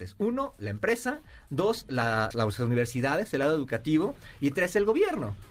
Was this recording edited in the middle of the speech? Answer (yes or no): yes